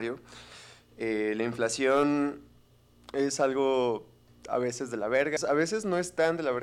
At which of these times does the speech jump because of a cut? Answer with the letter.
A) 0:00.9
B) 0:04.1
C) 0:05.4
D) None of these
C